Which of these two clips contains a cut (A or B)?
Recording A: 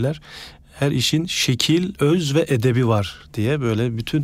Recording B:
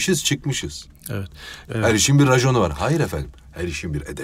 B